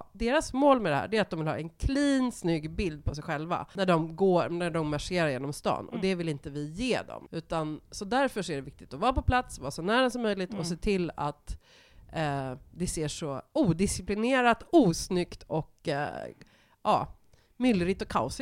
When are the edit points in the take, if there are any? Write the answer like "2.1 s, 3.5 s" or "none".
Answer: 7.3 s